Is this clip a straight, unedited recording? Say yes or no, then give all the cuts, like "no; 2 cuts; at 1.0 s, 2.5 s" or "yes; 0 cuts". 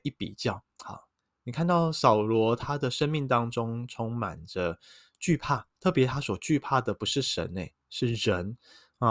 no; 1 cut; at 5.7 s